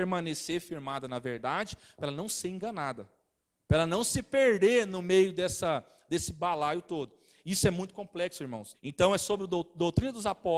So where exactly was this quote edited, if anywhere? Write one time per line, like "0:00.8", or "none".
0:08.7